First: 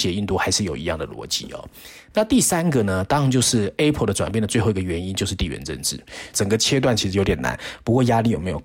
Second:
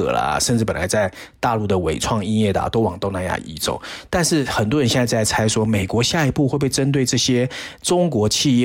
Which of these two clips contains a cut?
first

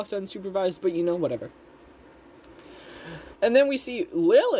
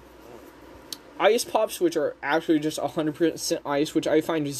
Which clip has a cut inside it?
first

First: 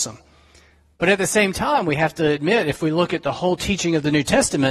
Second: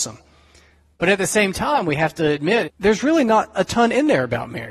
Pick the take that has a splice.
second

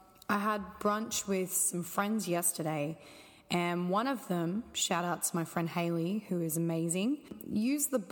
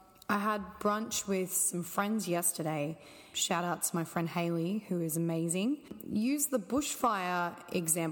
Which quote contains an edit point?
second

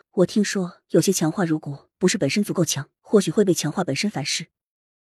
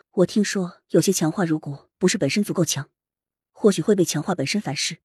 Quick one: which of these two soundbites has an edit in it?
first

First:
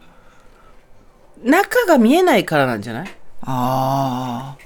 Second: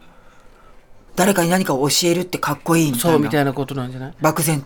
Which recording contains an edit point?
second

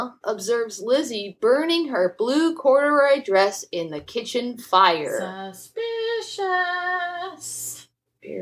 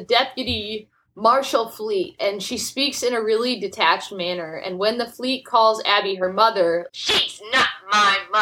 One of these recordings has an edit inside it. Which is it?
second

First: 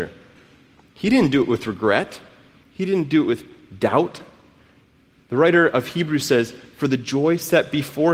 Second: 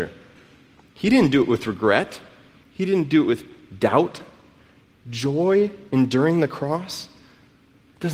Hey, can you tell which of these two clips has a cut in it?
second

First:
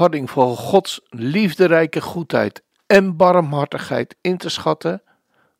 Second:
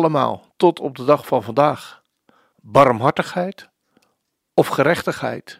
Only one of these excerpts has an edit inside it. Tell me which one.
second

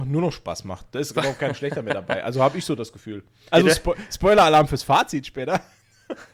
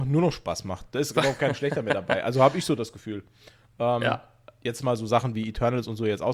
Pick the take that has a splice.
first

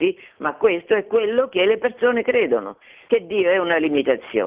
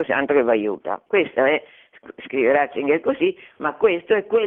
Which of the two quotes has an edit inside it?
second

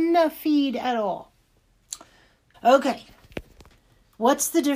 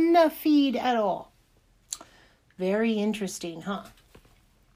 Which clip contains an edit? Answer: first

